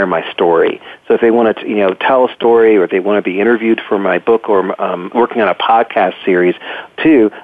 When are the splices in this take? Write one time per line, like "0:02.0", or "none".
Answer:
0:05.1